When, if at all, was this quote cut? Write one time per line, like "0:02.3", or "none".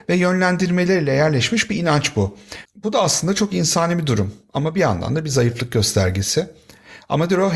0:02.7